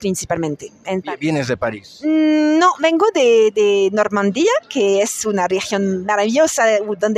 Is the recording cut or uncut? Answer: uncut